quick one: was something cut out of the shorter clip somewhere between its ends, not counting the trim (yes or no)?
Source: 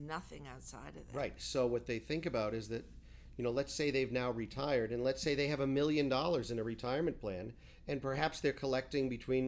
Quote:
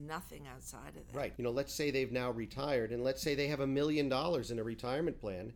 yes